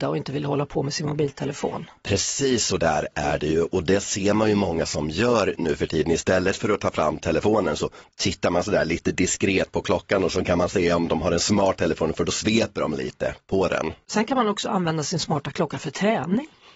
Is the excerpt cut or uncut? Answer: uncut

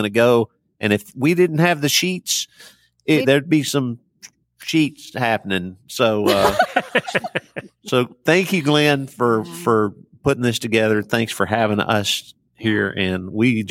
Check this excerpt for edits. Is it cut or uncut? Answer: cut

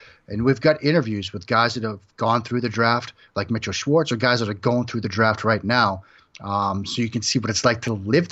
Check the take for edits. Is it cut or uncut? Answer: uncut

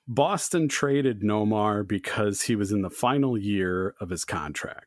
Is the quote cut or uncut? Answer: uncut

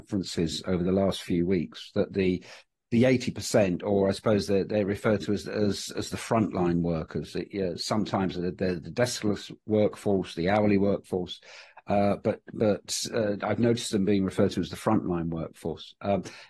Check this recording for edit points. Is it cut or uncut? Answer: uncut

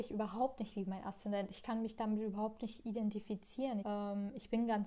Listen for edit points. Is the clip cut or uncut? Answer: cut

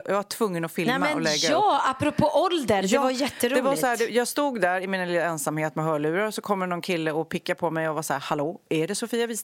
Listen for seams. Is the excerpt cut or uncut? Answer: uncut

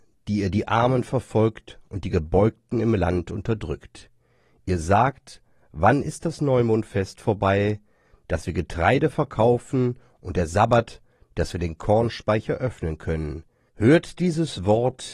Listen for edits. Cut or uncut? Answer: cut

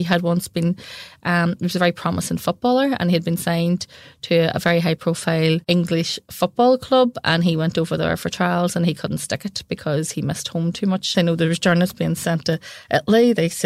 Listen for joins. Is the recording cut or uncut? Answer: cut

